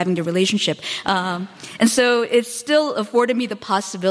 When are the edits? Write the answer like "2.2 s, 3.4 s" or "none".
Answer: 1.0 s